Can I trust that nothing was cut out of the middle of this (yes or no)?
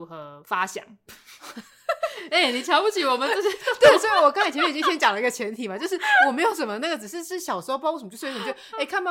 no